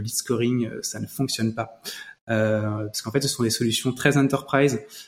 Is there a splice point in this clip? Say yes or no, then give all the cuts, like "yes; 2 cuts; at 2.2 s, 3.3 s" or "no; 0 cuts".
no; 0 cuts